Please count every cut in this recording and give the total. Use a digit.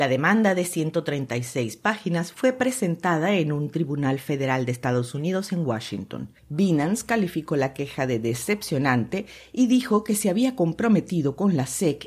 1